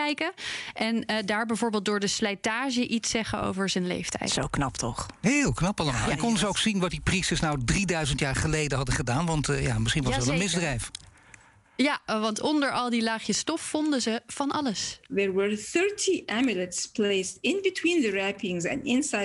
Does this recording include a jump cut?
no; 0 cuts

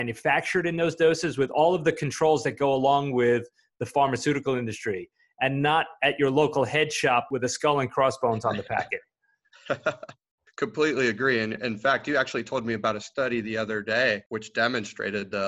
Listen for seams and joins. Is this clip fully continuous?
yes; 0 cuts

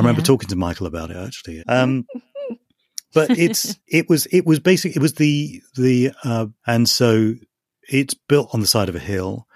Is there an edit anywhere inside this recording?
yes; 3 cuts; at 1.6 s, 3.8 s, 6.6 s

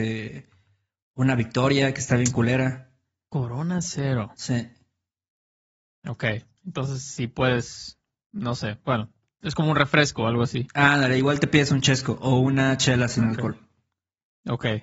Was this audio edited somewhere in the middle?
no; 0 cuts

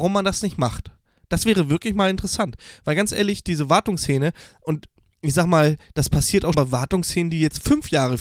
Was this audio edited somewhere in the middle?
yes; 1 cut; at 6.5 s

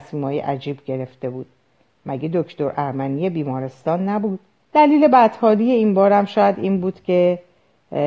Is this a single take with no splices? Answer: no; 1 cut; at 4.6 s

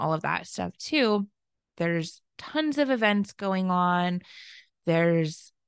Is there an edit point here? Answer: yes; 1 cut; at 1.7 s

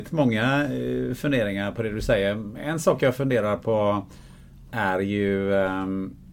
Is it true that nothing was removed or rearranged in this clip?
yes; 0 cuts

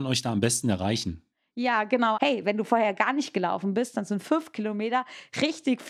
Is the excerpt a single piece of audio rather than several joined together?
no; 1 cut; at 2.1 s

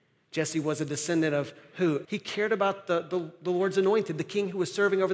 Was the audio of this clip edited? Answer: yes; 1 cut; at 2.1 s

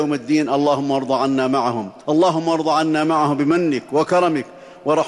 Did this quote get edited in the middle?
yes; 1 cut; at 2.0 s

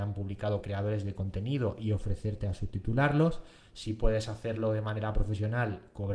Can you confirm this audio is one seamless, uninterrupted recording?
yes; 0 cuts

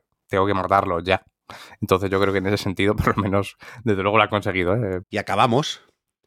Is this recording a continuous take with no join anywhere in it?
no; 1 cut; at 5.0 s

